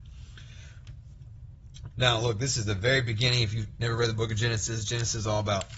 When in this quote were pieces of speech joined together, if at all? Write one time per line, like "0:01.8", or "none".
0:01.9